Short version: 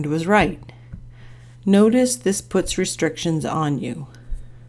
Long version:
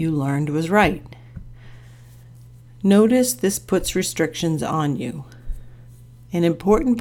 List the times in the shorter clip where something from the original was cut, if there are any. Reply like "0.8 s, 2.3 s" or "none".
1.5 s